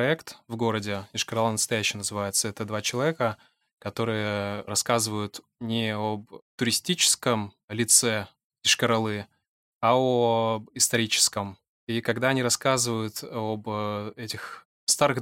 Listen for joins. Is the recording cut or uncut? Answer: uncut